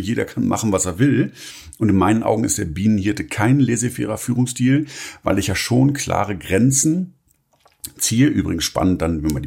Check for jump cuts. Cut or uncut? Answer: uncut